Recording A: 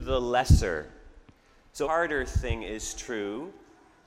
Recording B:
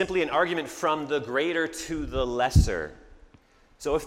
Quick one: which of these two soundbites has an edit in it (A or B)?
A